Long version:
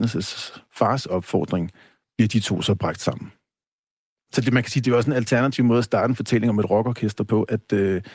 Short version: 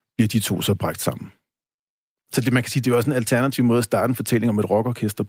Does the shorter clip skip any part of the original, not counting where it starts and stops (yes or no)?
no